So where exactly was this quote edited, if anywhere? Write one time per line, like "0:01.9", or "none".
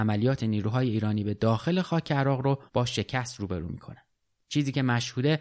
0:02.7